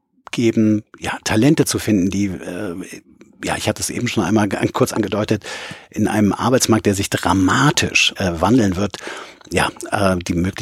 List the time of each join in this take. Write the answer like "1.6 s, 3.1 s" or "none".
8.2 s

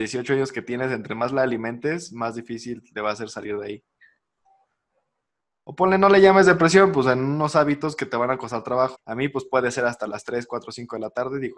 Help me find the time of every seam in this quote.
8.9 s

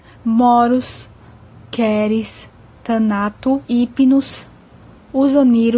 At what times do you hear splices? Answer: 3.6 s

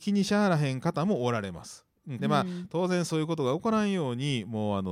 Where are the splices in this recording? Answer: 2.2 s

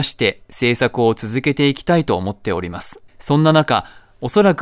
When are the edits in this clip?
3.1 s

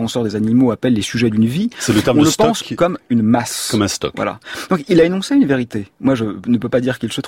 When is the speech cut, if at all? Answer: none

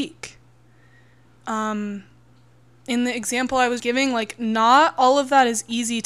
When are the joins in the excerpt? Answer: 3.8 s

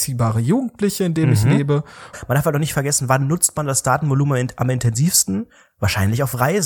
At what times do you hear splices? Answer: 2.1 s

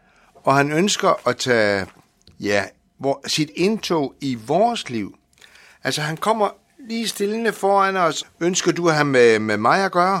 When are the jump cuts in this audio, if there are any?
8.2 s

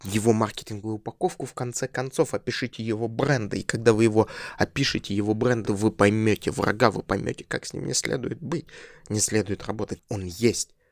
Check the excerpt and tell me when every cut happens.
5.6 s, 10.0 s

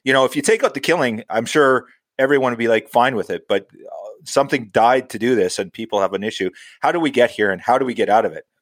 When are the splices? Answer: none

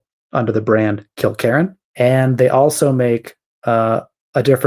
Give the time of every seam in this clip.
1.8 s

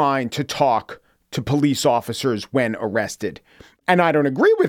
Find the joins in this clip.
none

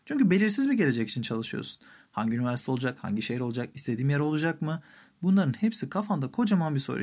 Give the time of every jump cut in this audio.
none

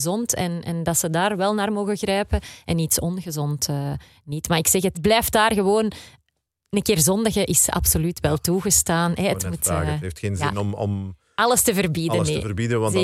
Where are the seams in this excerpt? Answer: 4.9 s

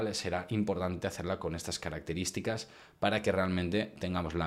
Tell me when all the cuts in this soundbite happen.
none

